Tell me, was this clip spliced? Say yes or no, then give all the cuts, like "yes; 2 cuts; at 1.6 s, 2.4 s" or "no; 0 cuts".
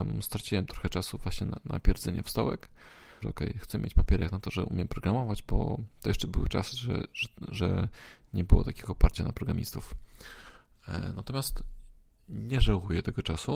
yes; 1 cut; at 3.2 s